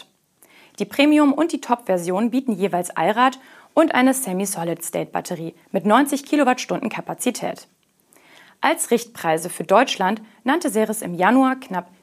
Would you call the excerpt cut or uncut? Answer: uncut